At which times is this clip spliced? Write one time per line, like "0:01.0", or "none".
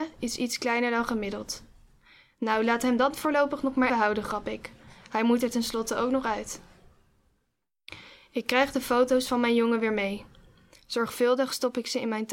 0:03.9